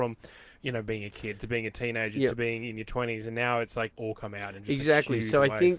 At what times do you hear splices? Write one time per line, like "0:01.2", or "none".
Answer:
0:03.9